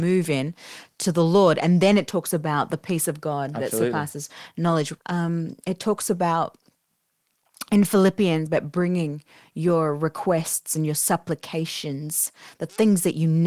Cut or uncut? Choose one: cut